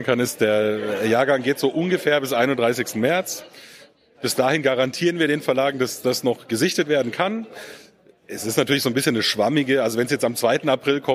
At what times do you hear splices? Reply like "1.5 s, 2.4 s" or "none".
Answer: none